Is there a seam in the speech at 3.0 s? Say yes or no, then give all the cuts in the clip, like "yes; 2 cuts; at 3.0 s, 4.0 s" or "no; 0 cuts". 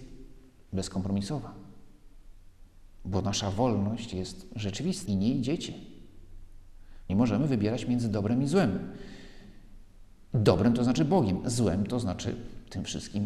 no; 2 cuts; at 5.1 s, 7.1 s